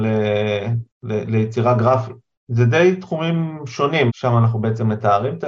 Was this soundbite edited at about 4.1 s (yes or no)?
yes